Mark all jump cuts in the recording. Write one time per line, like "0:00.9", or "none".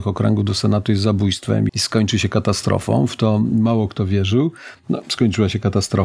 0:01.7